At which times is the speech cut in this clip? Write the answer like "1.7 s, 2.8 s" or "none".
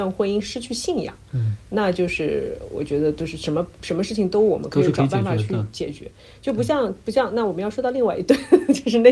none